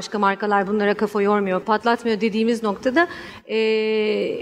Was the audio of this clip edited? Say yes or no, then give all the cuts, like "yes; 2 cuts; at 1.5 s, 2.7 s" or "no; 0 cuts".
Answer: yes; 1 cut; at 1.6 s